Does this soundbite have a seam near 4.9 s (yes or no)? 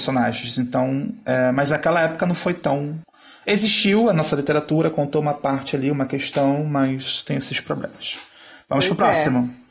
no